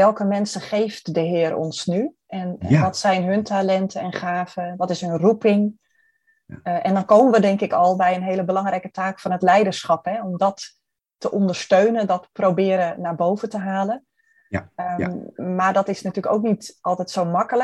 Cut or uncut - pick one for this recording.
uncut